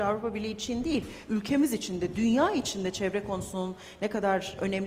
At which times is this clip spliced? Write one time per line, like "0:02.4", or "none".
none